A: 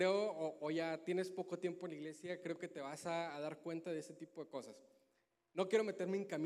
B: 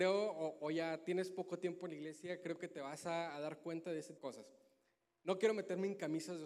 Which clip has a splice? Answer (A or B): B